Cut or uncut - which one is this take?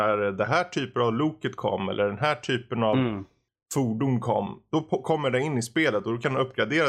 uncut